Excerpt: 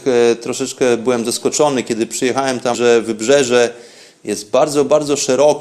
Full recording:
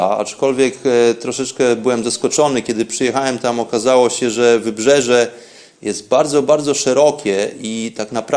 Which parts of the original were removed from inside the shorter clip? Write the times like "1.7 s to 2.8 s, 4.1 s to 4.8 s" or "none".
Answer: 3.5 s to 4.3 s